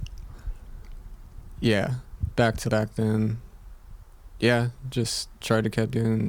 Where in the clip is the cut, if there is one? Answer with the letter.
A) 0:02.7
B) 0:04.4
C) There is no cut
A